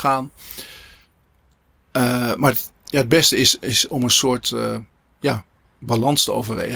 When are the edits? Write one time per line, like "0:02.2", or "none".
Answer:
none